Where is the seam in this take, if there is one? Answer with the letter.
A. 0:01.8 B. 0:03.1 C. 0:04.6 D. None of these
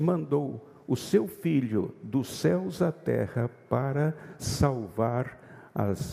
D